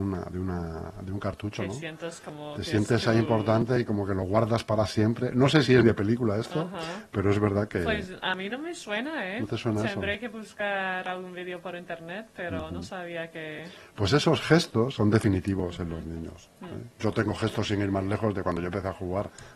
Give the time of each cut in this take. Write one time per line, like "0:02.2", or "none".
0:05.8